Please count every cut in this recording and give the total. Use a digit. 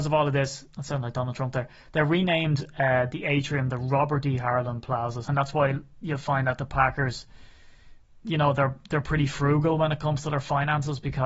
1